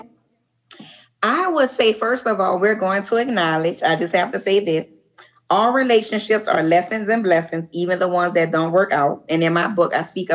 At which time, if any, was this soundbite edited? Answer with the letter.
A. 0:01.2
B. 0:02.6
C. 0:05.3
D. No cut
D